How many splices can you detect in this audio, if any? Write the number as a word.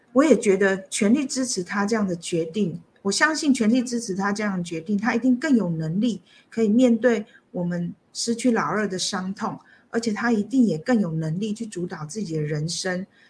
zero